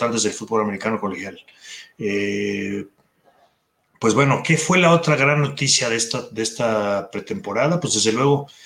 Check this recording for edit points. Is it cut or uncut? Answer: uncut